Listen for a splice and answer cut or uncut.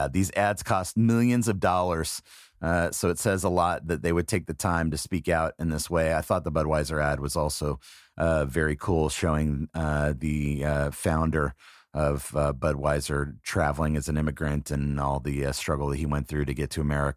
uncut